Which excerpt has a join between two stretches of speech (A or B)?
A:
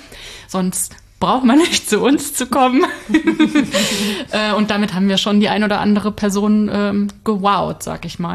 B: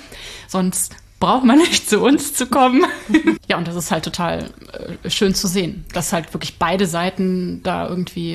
B